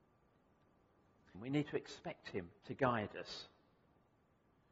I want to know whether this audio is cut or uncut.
cut